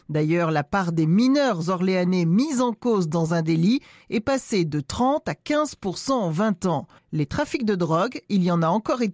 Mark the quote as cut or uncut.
cut